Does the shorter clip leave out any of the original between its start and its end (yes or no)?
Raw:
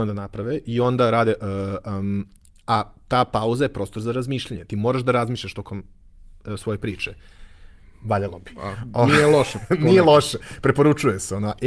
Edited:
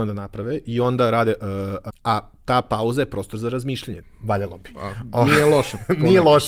yes